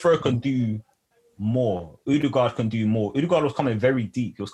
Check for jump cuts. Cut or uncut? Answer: uncut